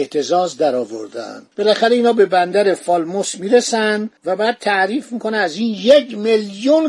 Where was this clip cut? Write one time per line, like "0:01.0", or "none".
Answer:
0:01.5
0:04.2